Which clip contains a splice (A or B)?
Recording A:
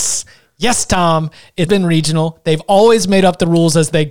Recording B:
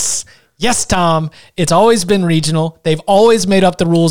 A